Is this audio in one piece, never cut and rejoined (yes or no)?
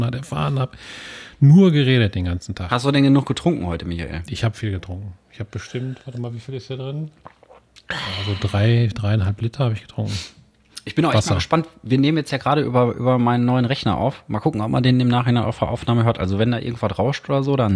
yes